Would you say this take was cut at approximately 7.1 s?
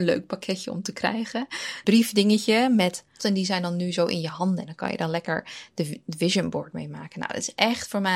no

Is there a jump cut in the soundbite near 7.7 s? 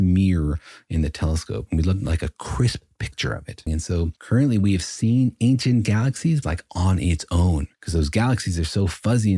yes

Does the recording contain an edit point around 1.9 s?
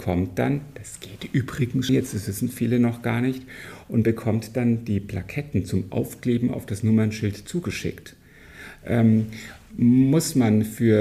yes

